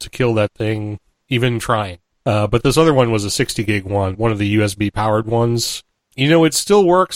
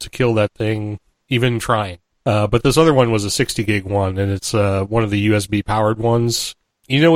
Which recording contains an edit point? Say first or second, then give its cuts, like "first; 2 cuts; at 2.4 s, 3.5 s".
first; 1 cut; at 4.1 s